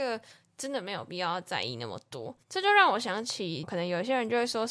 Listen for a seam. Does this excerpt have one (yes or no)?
yes